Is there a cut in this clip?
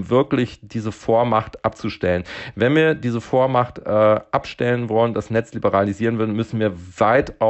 no; 0 cuts

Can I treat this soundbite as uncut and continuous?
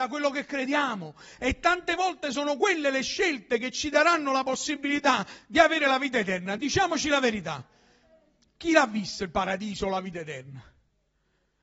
yes; 0 cuts

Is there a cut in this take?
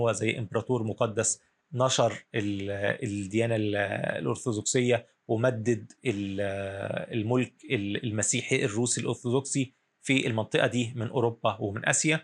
yes; 1 cut; at 6.0 s

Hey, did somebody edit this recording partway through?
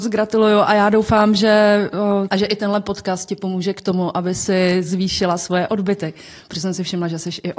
yes; 1 cut; at 2.3 s

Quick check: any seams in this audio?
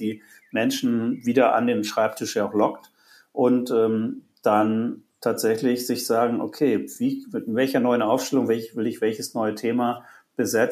no; 0 cuts

